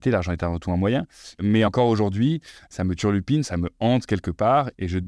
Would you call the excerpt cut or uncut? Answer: cut